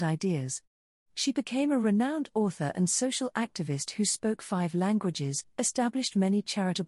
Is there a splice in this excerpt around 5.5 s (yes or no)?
yes